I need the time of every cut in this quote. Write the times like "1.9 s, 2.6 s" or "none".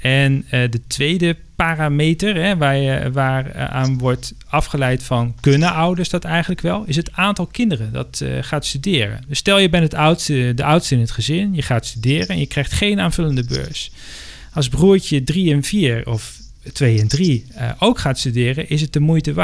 none